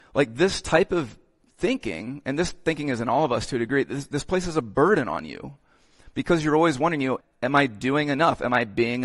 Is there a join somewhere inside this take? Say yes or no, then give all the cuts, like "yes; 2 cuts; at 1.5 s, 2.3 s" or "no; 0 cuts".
yes; 1 cut; at 7.2 s